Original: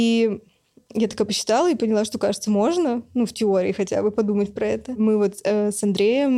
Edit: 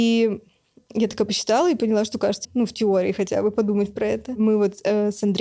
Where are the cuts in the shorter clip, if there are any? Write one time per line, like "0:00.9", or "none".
0:02.4